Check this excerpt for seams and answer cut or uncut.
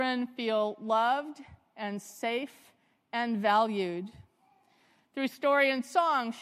uncut